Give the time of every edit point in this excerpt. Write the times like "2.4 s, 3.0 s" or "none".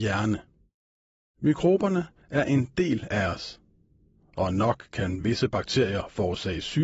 none